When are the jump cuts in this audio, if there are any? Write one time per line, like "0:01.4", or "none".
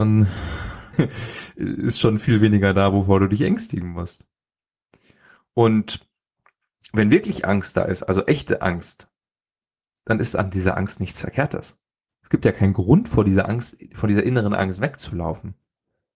0:00.9